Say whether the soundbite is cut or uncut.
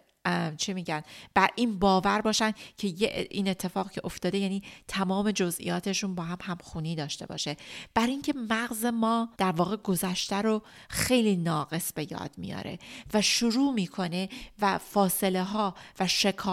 cut